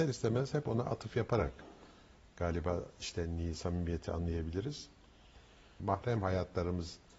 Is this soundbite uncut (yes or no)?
no